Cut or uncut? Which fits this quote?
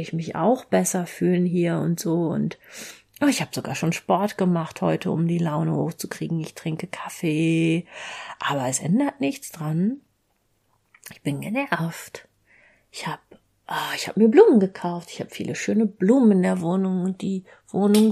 uncut